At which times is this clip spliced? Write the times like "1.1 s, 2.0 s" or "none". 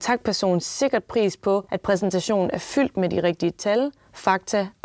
none